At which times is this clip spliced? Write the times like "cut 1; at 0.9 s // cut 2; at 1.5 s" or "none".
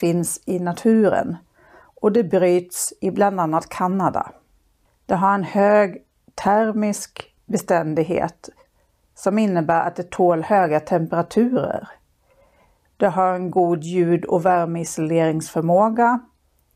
cut 1; at 4.9 s